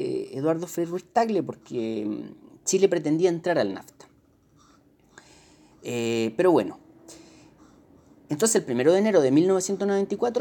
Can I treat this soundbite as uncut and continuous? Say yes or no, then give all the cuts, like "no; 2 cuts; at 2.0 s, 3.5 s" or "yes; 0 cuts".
yes; 0 cuts